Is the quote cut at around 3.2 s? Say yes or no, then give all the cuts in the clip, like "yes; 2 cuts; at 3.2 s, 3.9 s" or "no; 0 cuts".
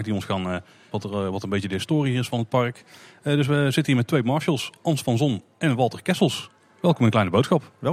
no; 1 cut; at 0.9 s